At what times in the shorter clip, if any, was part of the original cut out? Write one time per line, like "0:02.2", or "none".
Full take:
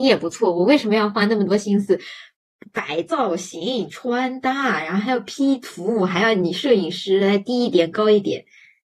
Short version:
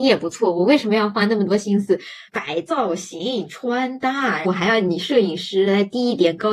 0:02.3
0:04.4